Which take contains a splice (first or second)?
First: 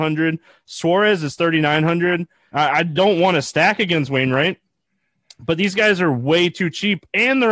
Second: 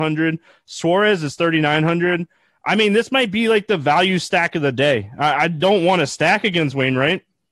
first